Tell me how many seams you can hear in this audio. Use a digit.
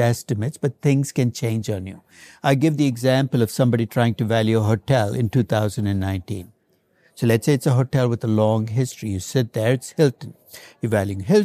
0